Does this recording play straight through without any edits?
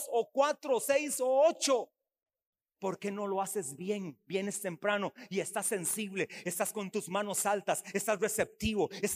no; 3 cuts; at 2.8 s, 6.4 s, 7.9 s

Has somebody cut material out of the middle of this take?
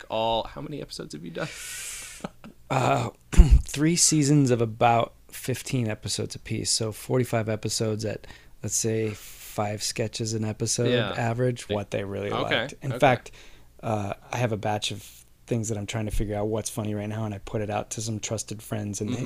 yes; 2 cuts; at 11.7 s, 14.2 s

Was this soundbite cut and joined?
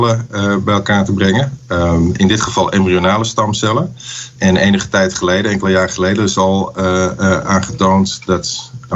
no; 0 cuts

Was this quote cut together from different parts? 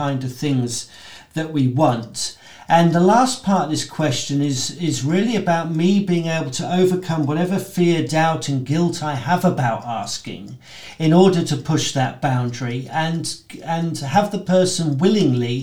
no; 0 cuts

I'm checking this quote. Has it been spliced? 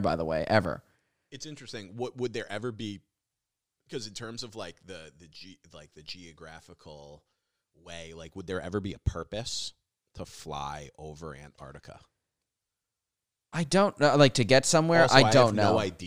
no; 0 cuts

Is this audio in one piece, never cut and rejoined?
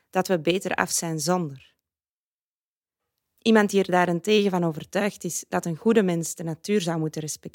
no; 1 cut; at 3.4 s

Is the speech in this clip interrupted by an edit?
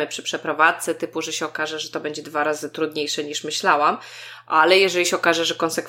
no; 0 cuts

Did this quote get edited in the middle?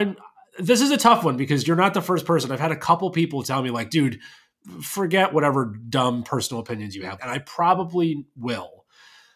yes; 1 cut; at 7.2 s

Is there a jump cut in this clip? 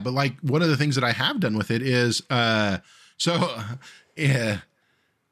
no; 0 cuts

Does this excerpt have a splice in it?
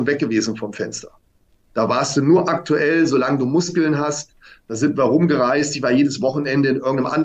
no; 0 cuts

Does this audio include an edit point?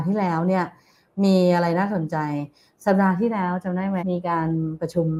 yes; 1 cut; at 4.0 s

